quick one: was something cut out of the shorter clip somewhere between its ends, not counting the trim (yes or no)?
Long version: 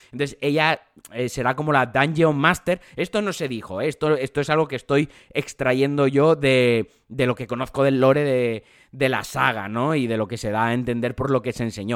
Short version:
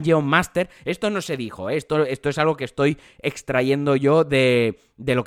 no